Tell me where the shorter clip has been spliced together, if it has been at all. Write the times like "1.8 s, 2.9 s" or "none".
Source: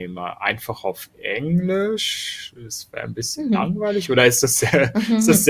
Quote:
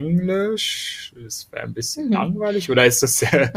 none